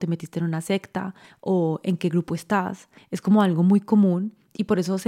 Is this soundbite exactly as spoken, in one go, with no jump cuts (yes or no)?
yes